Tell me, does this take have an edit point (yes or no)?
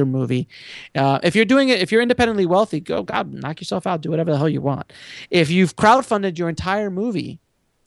no